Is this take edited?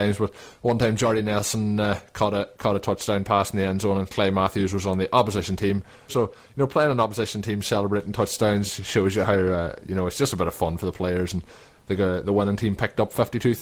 yes; 1 cut; at 6.1 s

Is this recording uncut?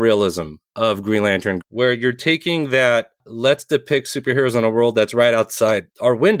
no; 1 cut; at 1.6 s

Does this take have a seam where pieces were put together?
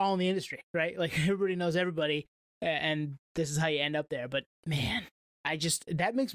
no; 0 cuts

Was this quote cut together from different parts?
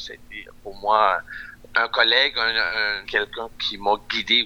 yes; 2 cuts; at 1.7 s, 3.0 s

